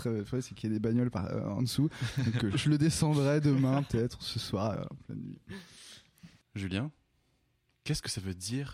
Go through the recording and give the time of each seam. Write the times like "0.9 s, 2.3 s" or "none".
2.5 s